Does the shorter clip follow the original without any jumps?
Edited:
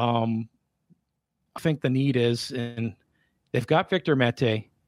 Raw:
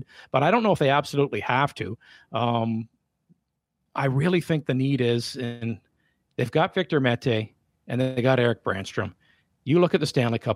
no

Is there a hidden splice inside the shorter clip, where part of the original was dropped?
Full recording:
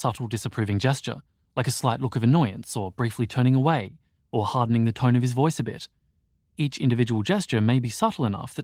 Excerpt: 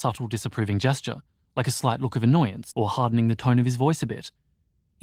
yes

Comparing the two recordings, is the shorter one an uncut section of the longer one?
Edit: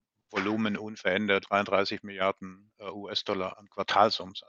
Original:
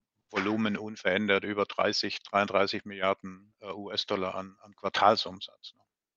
no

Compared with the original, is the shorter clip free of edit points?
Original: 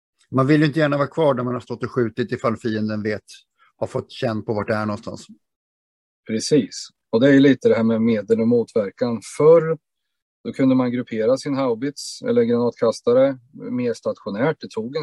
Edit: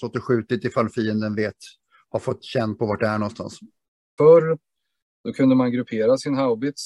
no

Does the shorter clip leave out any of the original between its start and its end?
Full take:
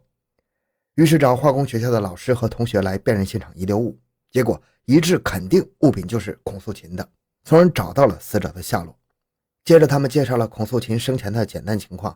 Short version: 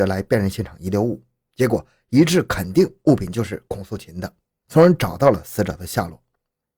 no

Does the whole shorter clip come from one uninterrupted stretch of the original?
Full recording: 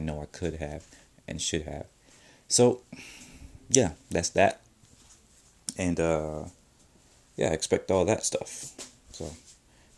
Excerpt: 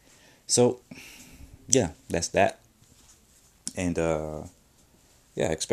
yes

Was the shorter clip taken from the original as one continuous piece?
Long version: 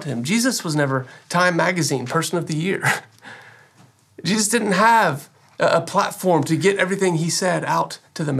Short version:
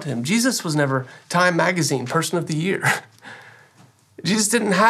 yes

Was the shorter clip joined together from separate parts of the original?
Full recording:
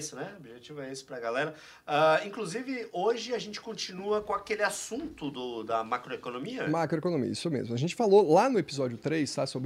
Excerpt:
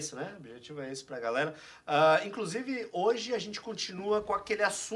no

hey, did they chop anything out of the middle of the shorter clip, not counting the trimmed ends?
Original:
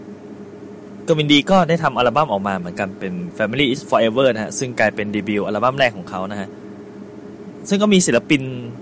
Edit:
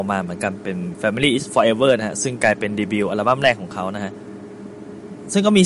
no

